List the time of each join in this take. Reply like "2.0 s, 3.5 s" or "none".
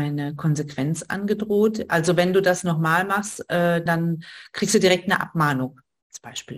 3.9 s